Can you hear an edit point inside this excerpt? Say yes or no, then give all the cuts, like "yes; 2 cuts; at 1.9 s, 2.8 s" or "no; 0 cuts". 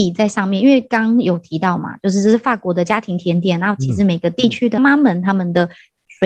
yes; 1 cut; at 4.8 s